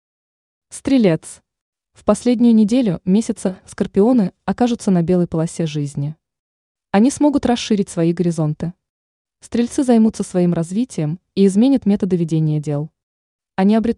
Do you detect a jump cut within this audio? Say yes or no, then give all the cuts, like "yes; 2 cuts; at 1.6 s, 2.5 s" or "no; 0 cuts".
no; 0 cuts